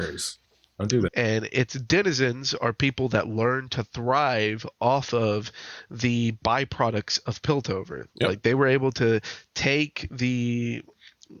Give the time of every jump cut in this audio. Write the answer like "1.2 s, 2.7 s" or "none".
1.1 s